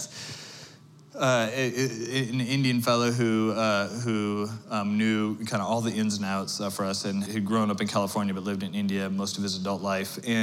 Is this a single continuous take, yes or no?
no